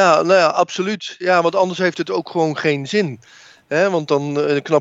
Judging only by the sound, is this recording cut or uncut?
uncut